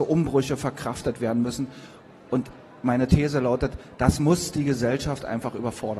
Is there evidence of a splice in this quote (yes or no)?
no